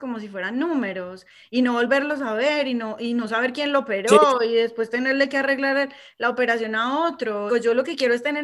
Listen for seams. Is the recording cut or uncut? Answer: cut